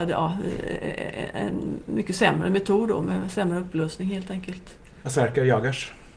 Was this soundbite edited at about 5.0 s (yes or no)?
yes